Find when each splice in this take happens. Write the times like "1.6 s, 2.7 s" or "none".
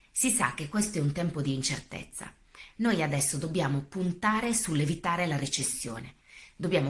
2.8 s